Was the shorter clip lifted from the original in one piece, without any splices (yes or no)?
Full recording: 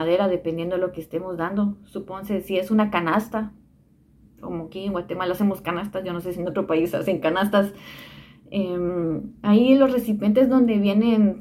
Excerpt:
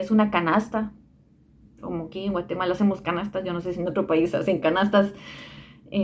yes